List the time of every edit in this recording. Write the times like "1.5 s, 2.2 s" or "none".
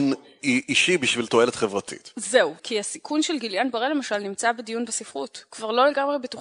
2.6 s